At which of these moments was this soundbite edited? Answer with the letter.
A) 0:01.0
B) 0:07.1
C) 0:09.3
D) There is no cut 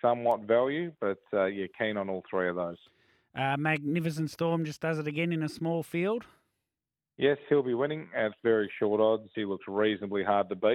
C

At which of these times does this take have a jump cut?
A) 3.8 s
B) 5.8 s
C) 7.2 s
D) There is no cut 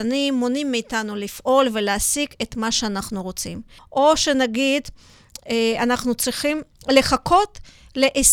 A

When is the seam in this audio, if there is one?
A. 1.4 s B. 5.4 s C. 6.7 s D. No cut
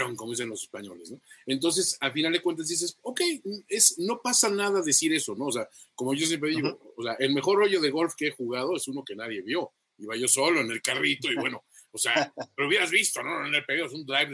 D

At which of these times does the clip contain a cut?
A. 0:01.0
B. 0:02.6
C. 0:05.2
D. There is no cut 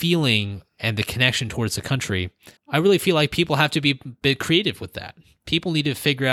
B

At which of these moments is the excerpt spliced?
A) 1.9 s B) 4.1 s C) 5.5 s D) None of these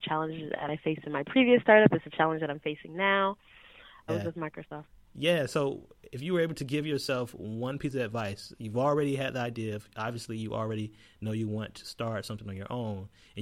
B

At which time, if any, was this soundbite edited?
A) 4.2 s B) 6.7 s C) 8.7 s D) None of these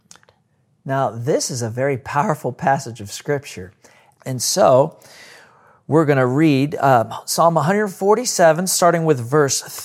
A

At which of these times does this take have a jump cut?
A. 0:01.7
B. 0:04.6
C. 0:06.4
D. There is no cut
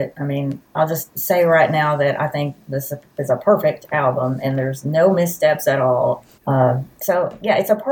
C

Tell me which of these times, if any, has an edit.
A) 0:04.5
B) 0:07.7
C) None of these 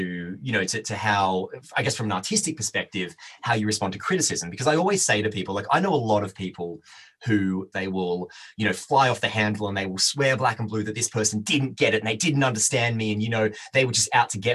B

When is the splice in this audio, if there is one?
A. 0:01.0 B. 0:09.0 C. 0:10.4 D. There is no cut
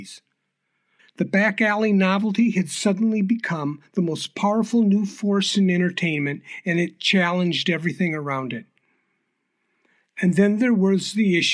A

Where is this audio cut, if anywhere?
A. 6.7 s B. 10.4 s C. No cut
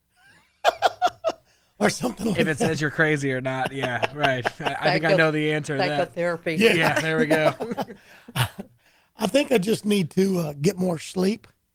C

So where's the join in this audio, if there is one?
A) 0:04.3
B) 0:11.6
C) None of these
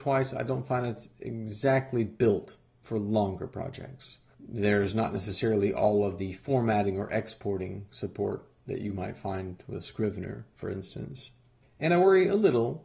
A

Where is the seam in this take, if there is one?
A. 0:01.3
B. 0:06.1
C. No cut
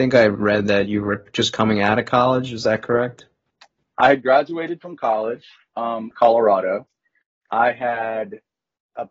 B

